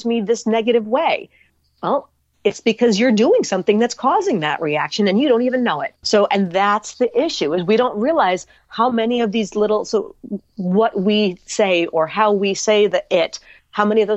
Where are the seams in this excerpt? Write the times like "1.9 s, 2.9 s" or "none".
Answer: 6.0 s